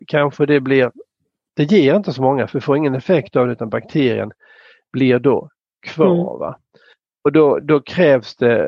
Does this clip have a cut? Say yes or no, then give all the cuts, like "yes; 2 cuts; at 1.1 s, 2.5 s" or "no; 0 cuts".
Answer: no; 0 cuts